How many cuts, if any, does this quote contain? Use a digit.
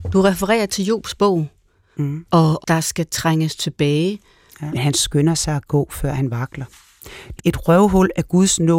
3